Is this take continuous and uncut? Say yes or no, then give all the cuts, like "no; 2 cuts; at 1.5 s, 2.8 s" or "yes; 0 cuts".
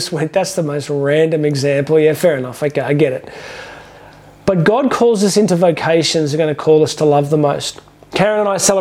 yes; 0 cuts